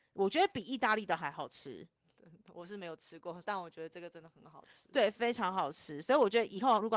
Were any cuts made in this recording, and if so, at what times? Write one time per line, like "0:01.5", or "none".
0:03.4

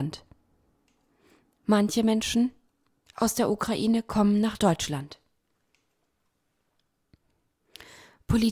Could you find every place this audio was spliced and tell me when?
none

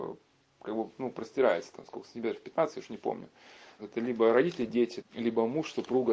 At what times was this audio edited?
0:03.8
0:05.0

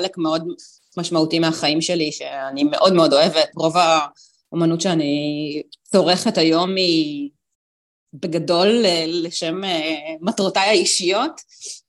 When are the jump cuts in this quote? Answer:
none

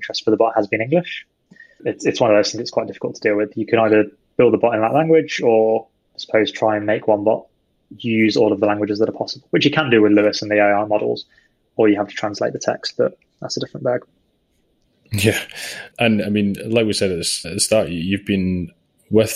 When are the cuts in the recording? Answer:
0:17.4

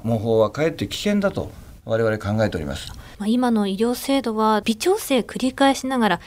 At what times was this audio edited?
0:04.6

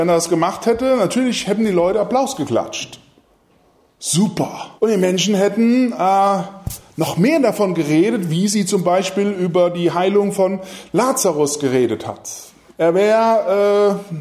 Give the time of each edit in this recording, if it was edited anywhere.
0:04.8
0:12.7

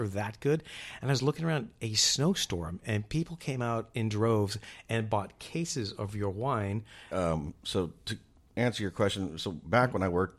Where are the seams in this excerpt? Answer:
0:07.1

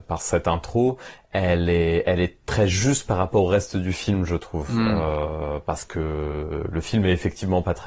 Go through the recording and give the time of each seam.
none

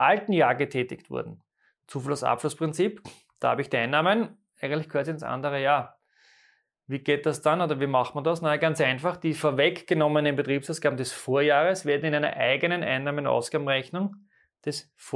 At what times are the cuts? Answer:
none

